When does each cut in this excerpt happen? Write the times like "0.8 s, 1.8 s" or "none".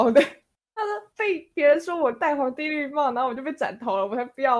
1.1 s